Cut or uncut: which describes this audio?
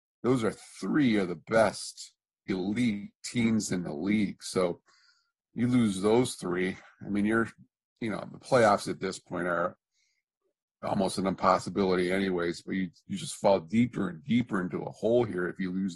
uncut